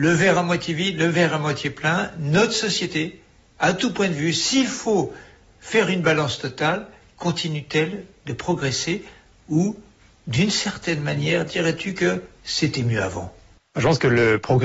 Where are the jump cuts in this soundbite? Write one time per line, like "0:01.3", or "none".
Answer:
none